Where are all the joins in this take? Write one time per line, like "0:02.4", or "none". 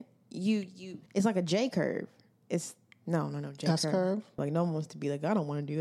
0:01.1
0:04.4